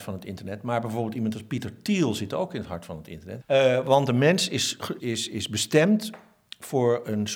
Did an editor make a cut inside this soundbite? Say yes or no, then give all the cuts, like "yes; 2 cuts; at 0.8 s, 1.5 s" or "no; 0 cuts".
yes; 2 cuts; at 3.4 s, 5.0 s